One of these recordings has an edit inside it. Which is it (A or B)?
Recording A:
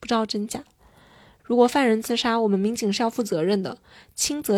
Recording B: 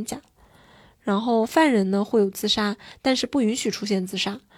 A